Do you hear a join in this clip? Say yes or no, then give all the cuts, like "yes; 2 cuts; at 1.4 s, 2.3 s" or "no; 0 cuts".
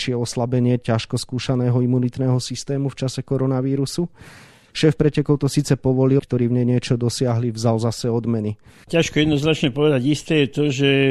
yes; 2 cuts; at 6.2 s, 8.8 s